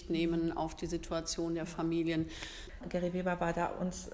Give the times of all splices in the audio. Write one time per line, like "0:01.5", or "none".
0:02.8